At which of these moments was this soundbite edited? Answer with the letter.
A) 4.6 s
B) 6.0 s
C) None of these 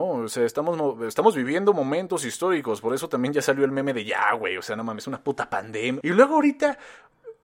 B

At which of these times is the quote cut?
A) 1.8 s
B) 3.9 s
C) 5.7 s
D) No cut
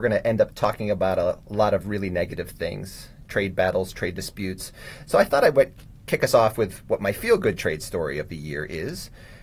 B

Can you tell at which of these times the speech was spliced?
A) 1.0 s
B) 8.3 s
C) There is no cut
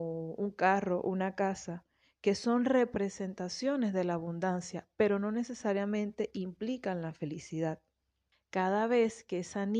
B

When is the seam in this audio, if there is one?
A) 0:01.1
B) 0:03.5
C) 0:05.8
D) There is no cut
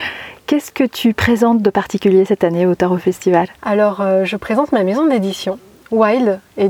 B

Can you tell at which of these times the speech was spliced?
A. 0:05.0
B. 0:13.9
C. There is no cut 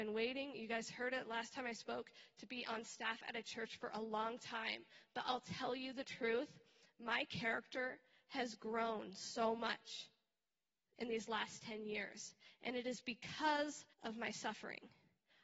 B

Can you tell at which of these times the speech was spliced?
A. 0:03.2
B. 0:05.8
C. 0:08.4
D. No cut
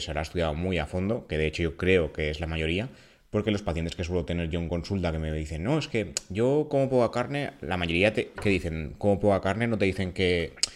C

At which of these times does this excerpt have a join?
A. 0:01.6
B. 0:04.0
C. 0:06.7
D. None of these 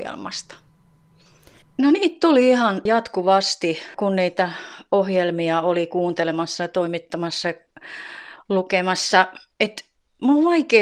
A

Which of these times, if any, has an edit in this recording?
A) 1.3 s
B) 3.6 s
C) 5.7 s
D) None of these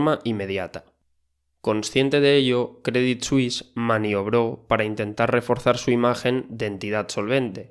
D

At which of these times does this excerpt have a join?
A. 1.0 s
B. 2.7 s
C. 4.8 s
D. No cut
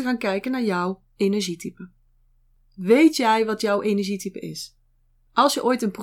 D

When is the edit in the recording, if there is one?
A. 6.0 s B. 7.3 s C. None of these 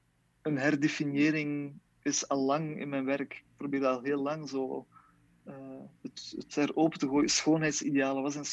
C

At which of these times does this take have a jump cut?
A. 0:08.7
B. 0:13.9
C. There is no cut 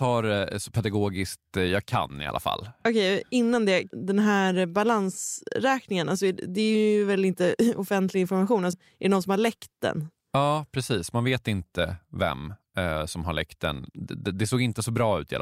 A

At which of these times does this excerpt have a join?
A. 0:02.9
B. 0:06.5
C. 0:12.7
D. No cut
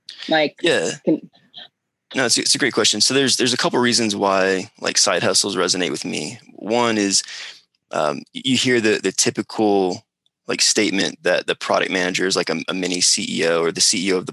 D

